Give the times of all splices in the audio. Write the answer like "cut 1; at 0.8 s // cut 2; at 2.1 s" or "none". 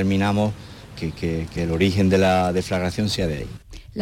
cut 1; at 1.0 s

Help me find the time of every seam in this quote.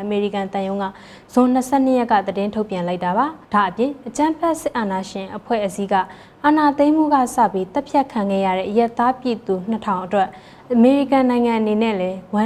cut 1; at 3.4 s

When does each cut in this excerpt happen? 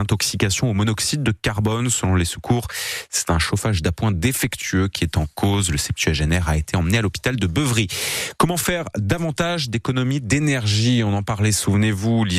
none

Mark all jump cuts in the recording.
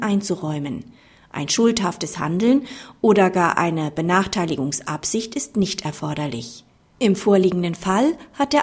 none

